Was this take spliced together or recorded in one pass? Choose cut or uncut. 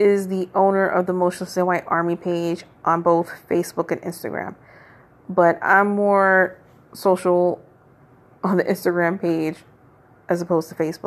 uncut